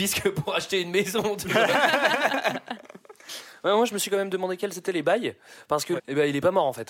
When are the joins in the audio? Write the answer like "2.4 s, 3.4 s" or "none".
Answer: 6.0 s

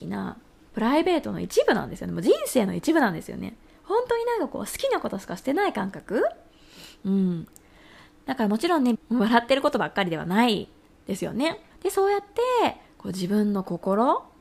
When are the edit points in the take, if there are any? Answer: 8.9 s, 11.7 s

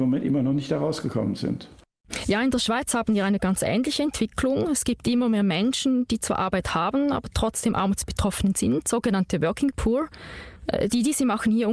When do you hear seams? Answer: none

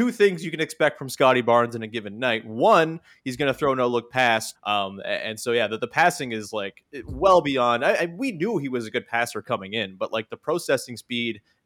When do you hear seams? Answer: 4.5 s

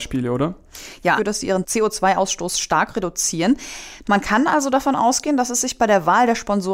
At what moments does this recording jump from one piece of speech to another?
1.2 s, 4.0 s

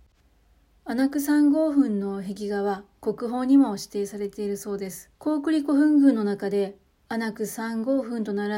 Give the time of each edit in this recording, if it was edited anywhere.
5.2 s

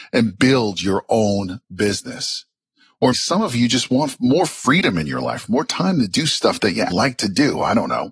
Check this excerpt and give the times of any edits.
3.1 s, 6.9 s

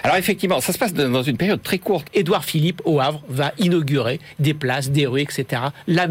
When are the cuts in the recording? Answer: 2.0 s

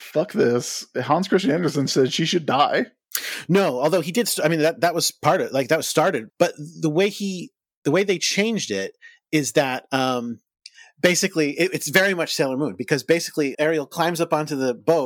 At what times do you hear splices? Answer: 6.3 s, 13.5 s

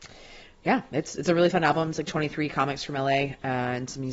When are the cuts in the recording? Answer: none

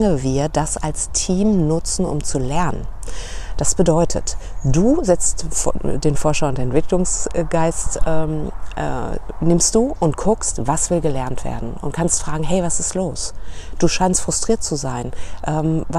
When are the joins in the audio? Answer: none

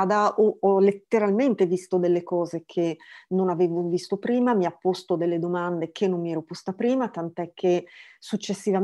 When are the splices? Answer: none

